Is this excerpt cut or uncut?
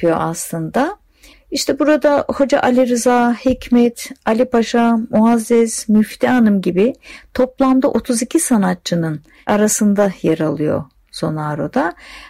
cut